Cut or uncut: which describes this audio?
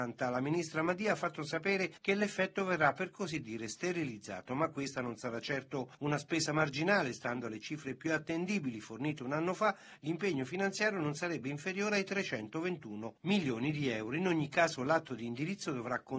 uncut